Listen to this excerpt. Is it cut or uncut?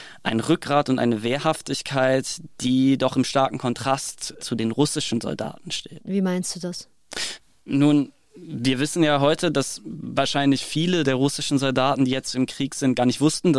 uncut